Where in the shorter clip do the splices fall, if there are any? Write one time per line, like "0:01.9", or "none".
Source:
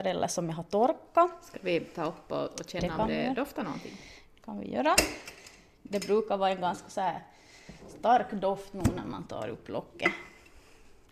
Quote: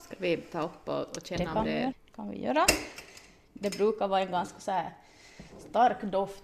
0:01.9